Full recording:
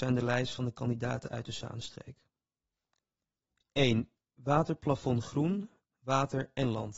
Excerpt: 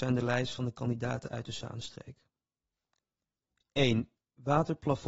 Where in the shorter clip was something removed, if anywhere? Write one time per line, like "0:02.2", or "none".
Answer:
none